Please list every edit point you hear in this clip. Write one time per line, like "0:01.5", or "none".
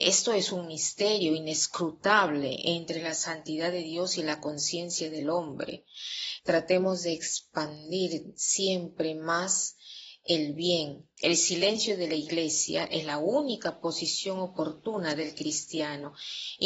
0:06.4
0:11.2